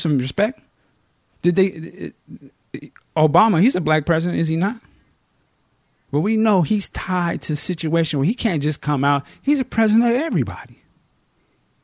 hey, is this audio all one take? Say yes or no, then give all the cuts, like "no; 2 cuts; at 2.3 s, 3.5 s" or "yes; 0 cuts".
yes; 0 cuts